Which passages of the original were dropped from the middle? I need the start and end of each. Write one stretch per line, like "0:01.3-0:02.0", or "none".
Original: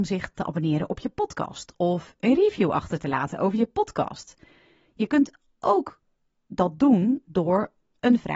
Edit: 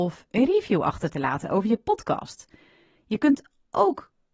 none